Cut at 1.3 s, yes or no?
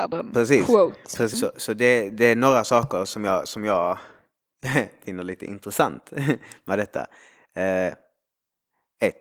yes